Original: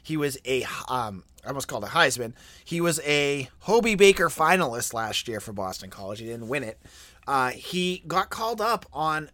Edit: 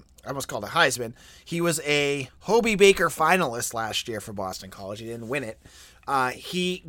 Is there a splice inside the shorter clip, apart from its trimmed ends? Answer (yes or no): no